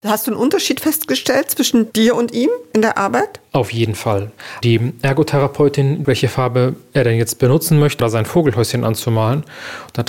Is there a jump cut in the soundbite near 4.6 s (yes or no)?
no